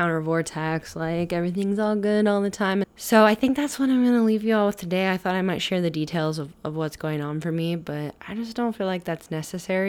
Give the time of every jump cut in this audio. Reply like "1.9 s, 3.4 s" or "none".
2.8 s

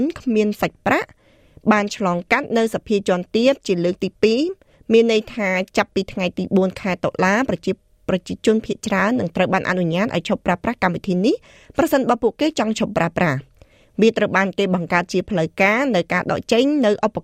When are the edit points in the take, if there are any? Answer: none

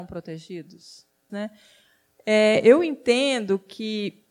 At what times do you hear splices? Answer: 1.3 s

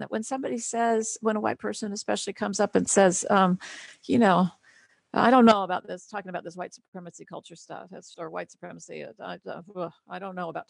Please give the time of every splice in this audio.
8.1 s

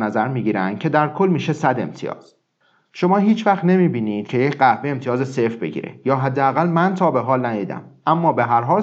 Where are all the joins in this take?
none

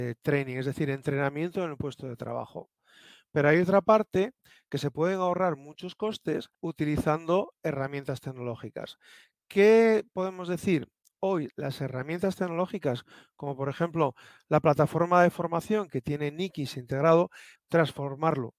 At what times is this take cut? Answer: 6.5 s, 17.6 s

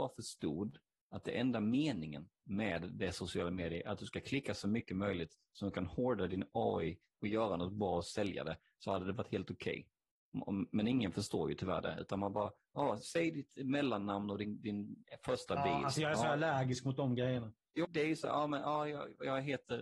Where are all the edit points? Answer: 17.8 s

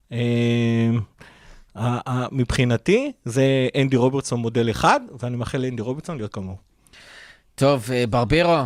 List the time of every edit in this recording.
none

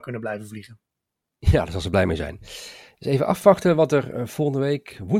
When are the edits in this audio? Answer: none

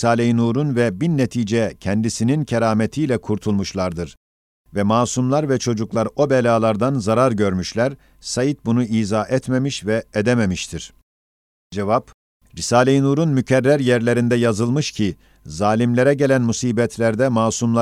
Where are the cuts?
none

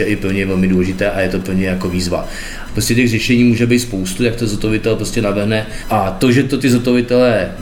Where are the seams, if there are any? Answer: 2.7 s, 5.8 s

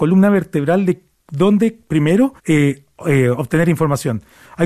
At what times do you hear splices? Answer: 2.4 s

